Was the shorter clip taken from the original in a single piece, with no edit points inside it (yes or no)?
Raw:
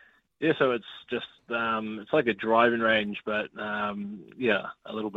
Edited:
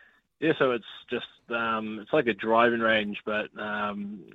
yes